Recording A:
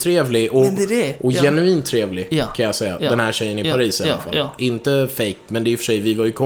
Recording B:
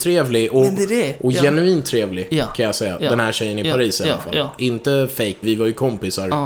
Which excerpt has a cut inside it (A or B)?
B